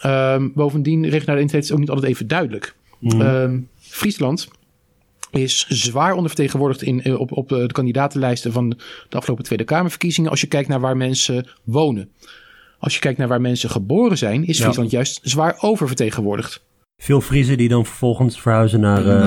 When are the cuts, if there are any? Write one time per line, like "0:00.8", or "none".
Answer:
none

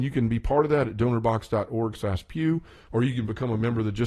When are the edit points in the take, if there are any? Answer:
none

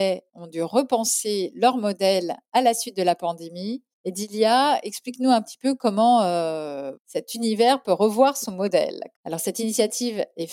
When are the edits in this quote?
0:09.1

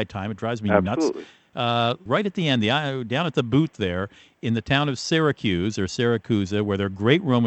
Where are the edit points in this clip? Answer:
0:02.1

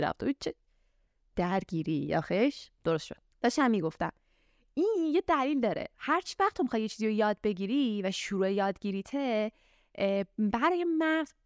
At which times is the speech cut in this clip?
0:03.3

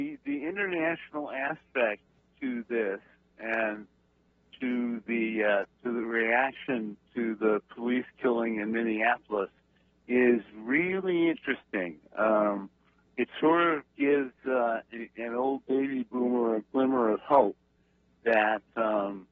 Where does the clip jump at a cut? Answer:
0:13.0

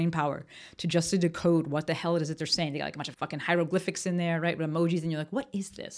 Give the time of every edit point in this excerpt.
0:03.1

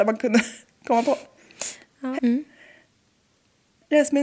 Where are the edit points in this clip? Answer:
0:02.2

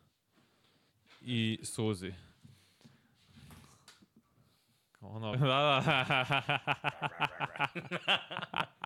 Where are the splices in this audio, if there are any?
0:05.3

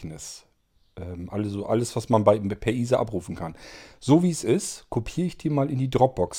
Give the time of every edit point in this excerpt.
none

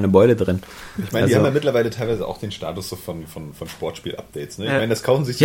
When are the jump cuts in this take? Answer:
none

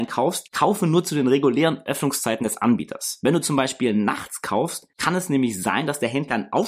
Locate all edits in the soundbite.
none

